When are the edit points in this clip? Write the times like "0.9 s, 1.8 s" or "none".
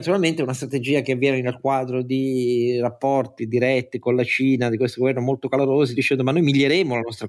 none